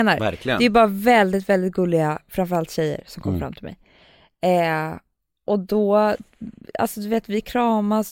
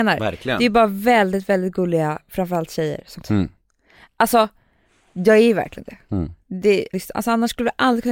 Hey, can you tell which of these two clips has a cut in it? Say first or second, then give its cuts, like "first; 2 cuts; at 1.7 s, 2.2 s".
second; 2 cuts; at 3.2 s, 6.9 s